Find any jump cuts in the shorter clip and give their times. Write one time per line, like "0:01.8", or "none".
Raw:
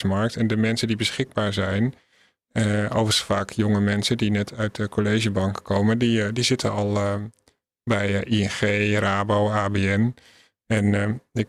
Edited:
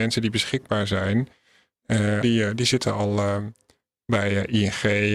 0:02.2